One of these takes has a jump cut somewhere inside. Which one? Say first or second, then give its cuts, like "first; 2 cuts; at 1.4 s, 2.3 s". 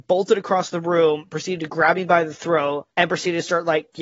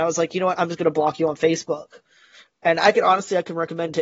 first; 1 cut; at 2.9 s